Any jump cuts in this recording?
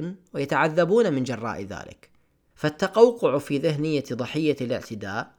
yes; 1 cut; at 2.5 s

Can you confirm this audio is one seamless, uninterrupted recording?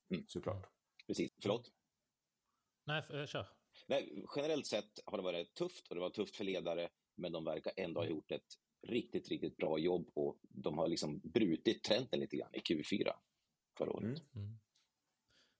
no; 1 cut; at 1.3 s

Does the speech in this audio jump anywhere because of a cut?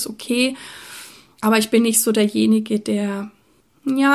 no; 0 cuts

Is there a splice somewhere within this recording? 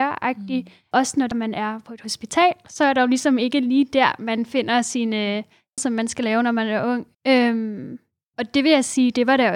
yes; 3 cuts; at 1.3 s, 5.8 s, 7.1 s

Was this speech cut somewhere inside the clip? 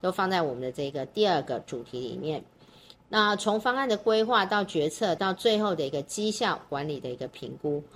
yes; 2 cuts; at 2.9 s, 5.2 s

